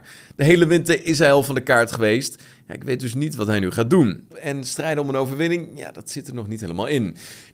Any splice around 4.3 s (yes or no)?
yes